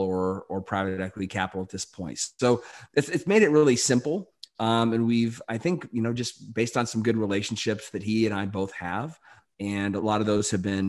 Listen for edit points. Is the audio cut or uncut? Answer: uncut